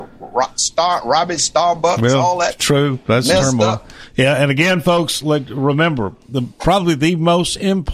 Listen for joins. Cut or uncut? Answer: uncut